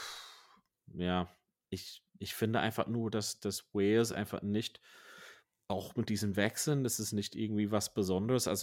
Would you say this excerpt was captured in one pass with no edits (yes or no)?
no